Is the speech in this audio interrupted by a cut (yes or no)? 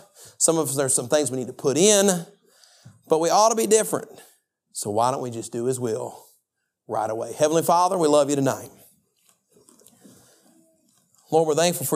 yes